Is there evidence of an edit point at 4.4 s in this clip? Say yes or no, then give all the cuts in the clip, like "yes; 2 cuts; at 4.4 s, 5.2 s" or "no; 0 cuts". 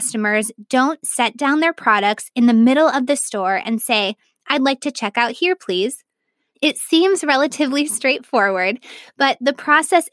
no; 1 cut; at 6.5 s